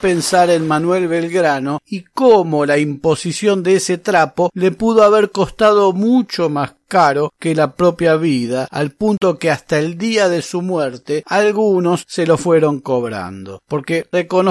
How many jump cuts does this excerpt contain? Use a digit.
0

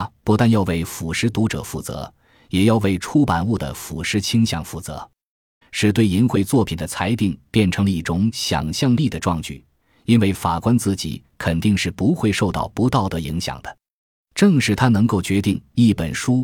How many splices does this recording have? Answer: 1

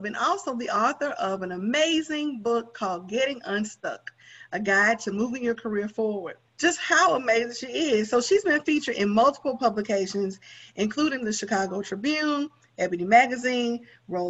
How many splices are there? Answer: 1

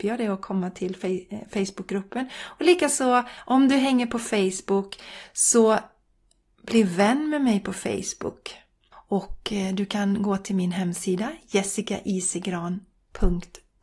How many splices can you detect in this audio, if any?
1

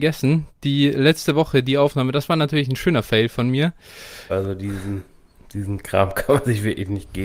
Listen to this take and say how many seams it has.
1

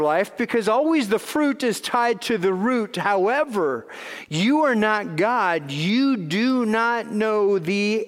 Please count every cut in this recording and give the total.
0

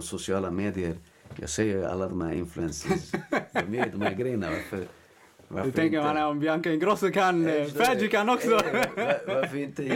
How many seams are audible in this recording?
0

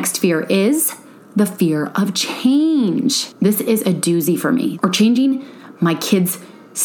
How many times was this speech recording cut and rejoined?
1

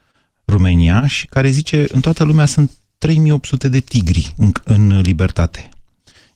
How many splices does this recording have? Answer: 0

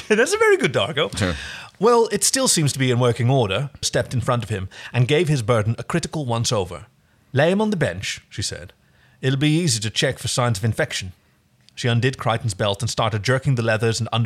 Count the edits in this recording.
1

